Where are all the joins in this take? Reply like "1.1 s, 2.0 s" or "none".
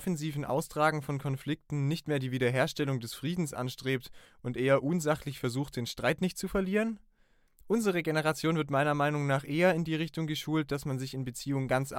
none